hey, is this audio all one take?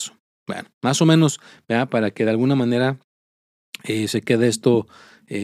yes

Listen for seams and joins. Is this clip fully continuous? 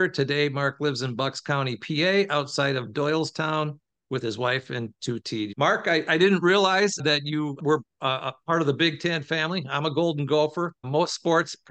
yes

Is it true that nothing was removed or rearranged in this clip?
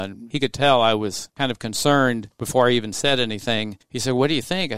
yes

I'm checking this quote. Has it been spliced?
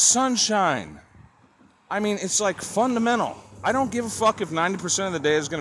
no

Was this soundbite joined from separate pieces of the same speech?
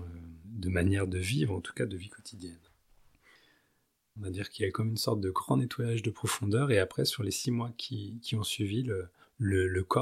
yes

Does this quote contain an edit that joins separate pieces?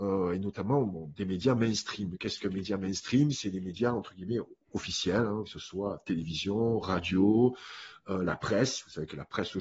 no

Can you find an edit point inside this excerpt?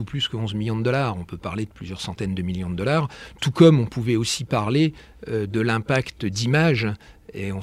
no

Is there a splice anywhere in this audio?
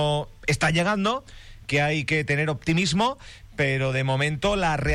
no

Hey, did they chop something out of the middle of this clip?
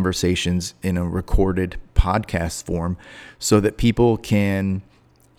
no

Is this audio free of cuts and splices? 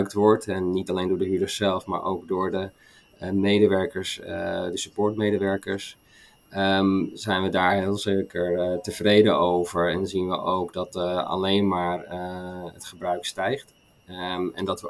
yes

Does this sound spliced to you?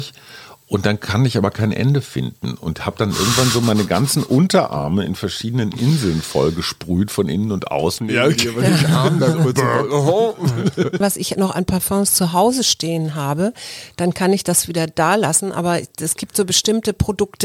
yes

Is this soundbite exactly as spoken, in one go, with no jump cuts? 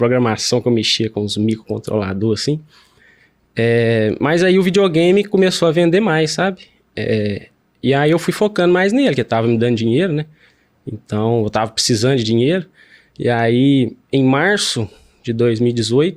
yes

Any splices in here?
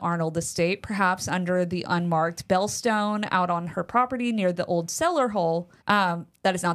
yes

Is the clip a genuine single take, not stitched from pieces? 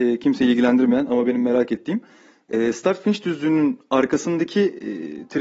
yes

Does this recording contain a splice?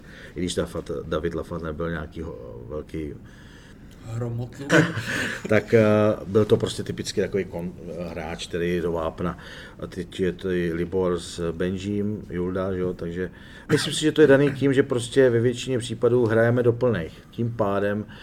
yes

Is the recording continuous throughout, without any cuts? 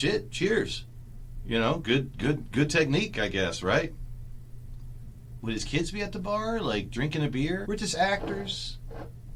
no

